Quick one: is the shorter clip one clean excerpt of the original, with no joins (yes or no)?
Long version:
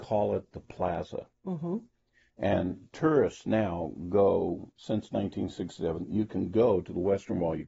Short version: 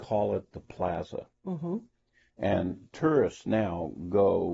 yes